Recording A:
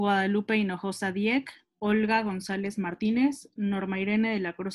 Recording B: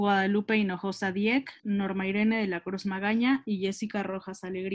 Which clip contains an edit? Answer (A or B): B